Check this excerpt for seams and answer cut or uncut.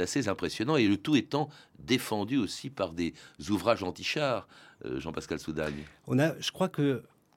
uncut